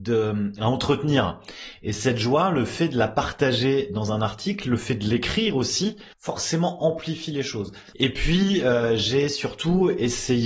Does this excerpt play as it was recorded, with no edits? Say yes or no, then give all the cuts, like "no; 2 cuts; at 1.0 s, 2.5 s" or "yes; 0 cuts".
no; 2 cuts; at 6.1 s, 7.9 s